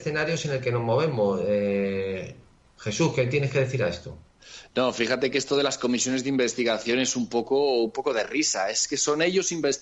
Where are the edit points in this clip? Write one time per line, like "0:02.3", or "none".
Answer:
none